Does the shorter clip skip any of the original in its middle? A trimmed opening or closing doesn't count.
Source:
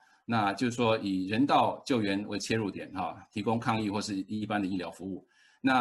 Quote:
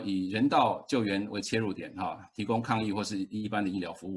no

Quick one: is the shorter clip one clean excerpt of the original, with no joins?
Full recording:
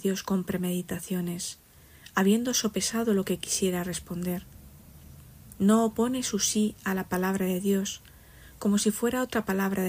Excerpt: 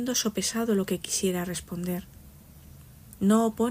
yes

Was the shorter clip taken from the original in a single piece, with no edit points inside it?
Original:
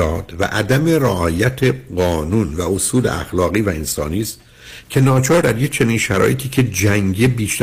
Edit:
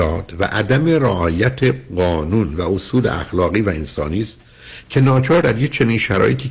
yes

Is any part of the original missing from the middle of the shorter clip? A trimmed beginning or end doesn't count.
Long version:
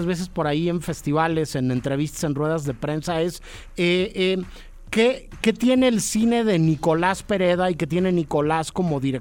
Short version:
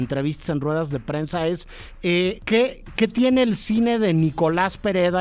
yes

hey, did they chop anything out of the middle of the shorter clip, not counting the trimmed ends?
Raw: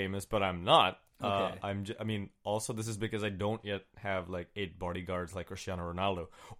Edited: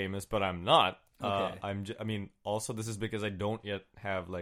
no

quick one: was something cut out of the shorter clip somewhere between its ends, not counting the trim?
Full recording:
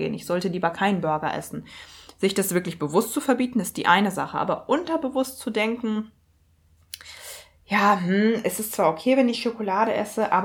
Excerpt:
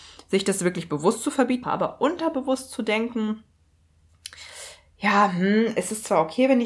yes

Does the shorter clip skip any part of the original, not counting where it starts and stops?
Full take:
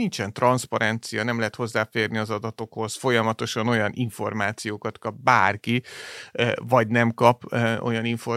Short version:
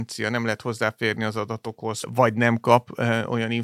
yes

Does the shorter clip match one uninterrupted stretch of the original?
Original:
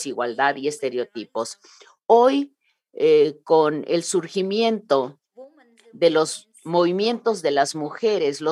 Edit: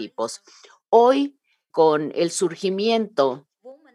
no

